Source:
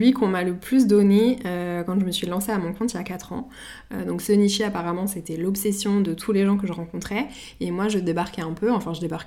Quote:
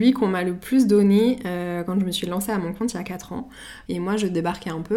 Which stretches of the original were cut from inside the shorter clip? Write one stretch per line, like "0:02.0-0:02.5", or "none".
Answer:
0:03.9-0:07.6